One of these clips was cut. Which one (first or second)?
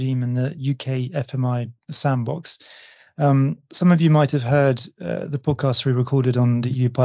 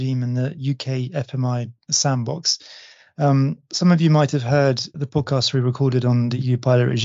second